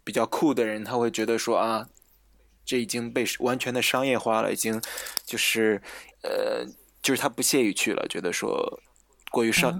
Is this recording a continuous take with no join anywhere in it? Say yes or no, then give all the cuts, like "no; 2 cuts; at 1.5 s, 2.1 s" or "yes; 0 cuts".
no; 1 cut; at 6.1 s